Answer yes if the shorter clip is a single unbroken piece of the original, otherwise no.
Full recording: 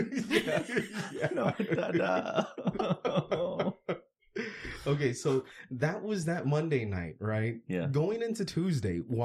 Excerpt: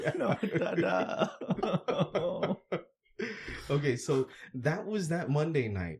yes